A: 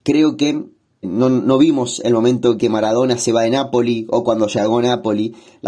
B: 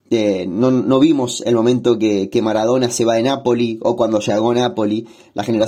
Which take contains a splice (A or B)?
A